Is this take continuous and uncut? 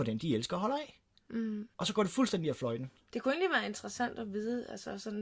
no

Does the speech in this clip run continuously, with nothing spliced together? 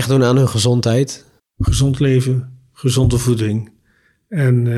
yes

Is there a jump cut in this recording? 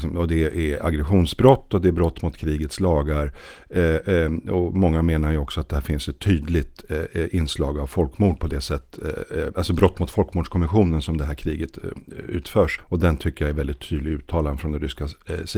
yes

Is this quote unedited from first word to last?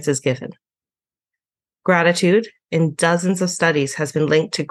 yes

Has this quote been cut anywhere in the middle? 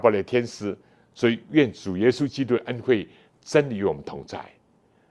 yes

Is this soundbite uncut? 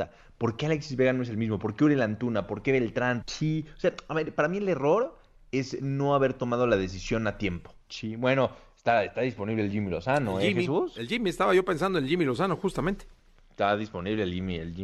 no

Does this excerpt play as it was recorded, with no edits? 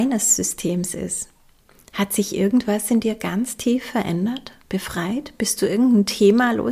yes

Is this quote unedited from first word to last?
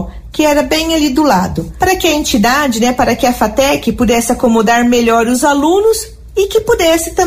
yes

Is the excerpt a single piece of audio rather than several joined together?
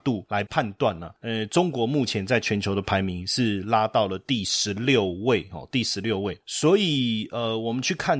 yes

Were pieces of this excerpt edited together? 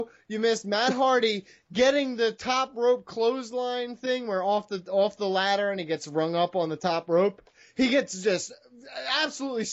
no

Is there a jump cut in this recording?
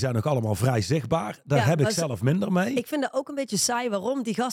no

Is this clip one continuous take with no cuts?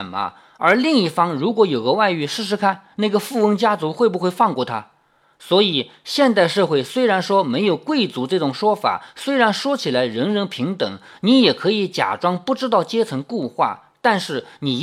yes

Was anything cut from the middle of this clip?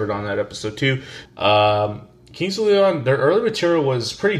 yes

